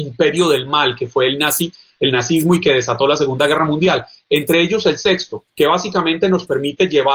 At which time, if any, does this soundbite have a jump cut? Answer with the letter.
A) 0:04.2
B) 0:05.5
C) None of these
B